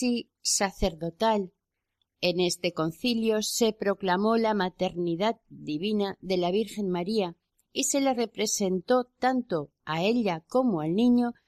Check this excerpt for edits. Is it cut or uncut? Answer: cut